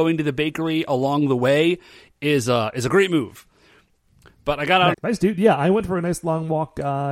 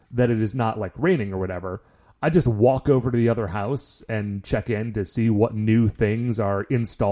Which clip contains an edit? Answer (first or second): first